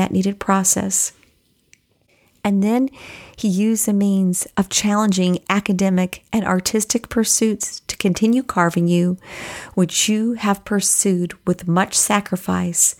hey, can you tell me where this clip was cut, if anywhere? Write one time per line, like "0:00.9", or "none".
none